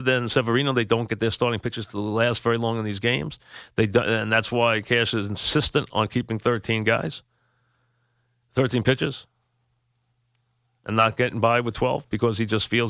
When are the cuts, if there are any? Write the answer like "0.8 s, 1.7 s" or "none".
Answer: none